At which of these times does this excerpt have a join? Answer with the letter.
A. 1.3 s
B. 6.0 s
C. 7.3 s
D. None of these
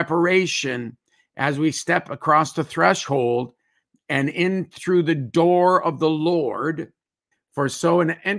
C